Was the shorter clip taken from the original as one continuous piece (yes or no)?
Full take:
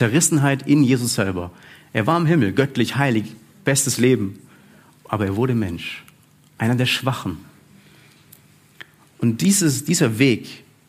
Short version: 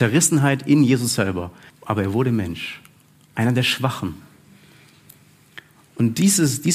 no